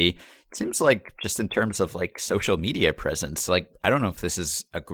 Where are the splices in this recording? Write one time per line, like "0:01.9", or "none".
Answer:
none